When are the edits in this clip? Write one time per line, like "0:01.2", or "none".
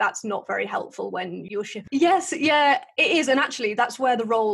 0:01.9